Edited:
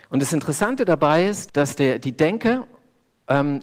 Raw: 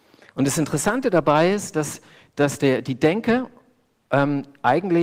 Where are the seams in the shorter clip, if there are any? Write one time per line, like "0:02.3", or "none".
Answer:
0:01.5